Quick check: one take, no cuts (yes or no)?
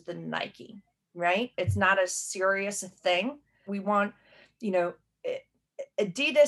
no